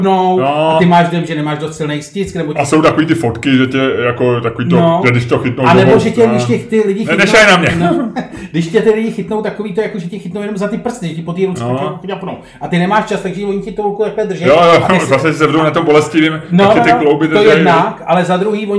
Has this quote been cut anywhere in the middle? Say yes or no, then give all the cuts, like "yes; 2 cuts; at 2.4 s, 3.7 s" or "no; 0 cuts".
no; 0 cuts